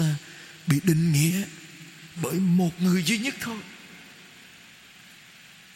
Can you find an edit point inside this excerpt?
yes; 1 cut; at 2.2 s

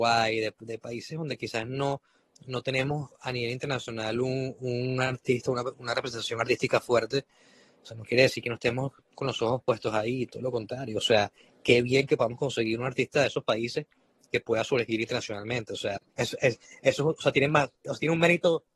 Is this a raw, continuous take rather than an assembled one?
no; 1 cut; at 16.2 s

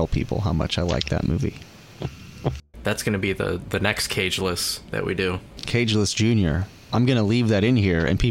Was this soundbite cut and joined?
no; 0 cuts

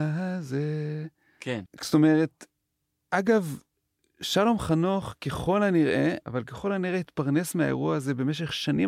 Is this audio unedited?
no; 2 cuts; at 1.7 s, 6.2 s

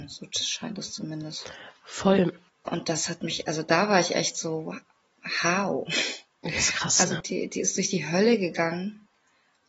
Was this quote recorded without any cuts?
no; 1 cut; at 2.5 s

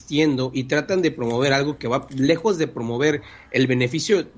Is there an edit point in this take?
no; 0 cuts

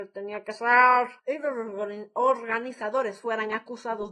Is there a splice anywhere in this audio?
yes; 1 cut; at 1.2 s

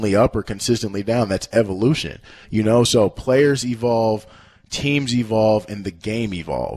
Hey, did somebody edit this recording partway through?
no; 0 cuts

